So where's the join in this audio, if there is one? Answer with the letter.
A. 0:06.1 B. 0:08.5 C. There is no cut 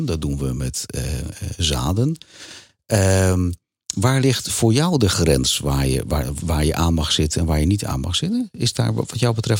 C